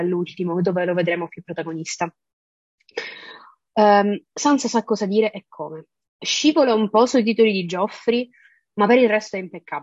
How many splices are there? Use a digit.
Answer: 0